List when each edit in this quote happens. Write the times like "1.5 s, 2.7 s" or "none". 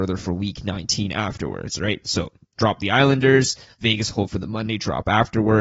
none